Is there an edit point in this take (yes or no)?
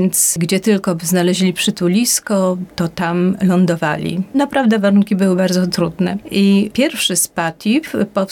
no